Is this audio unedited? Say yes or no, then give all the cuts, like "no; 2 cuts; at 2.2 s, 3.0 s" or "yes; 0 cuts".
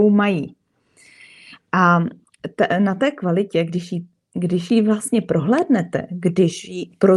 yes; 0 cuts